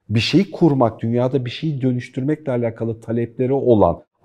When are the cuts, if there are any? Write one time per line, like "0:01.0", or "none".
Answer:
0:01.0